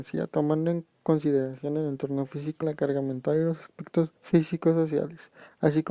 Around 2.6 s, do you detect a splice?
yes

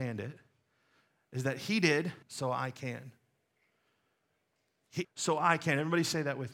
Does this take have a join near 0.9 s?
no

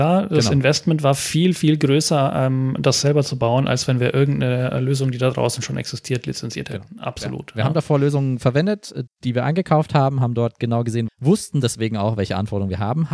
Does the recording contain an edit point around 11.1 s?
yes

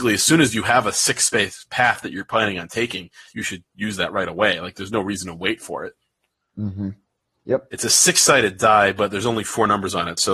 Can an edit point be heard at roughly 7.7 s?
yes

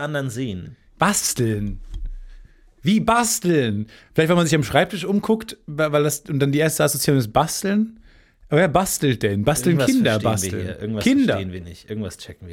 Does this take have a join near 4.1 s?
no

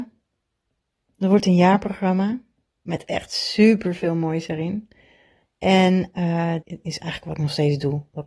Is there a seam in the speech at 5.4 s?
yes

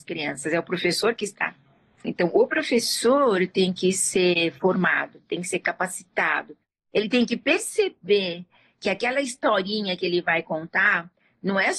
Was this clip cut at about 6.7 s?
no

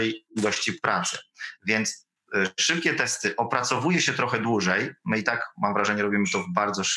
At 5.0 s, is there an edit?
no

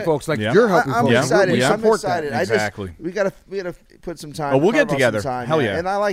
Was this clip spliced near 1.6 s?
no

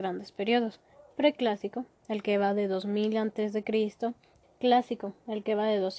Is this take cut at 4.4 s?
yes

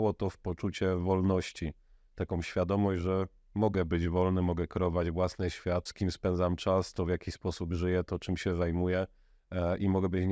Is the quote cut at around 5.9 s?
yes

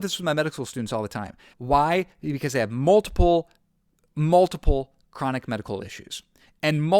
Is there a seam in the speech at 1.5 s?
yes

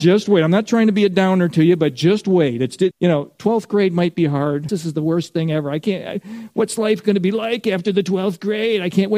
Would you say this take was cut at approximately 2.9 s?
yes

